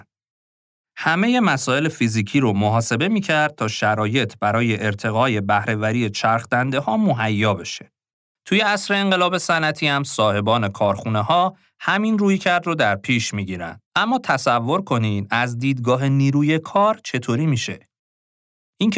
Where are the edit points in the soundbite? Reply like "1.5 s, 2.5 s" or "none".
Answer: 8.3 s, 13.8 s